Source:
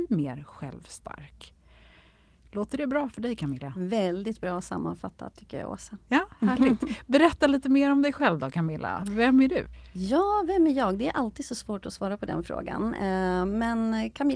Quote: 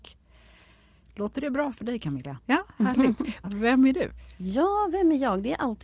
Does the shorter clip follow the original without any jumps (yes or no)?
no